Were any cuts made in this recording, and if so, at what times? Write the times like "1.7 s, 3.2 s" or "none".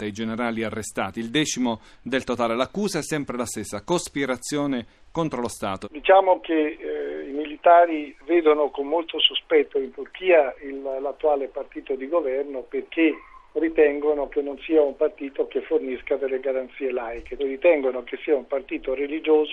5.8 s, 17.4 s